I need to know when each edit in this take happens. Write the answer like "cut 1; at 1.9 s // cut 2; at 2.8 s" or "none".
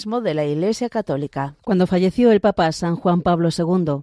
cut 1; at 1.6 s